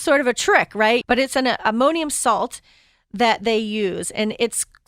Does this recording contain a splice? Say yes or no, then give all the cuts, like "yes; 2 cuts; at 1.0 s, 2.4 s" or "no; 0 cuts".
yes; 1 cut; at 1.0 s